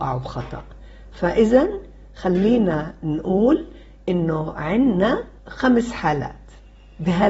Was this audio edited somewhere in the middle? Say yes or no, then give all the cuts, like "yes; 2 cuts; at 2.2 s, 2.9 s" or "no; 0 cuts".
yes; 1 cut; at 5.4 s